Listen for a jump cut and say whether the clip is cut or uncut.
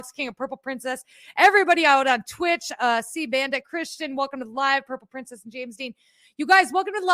uncut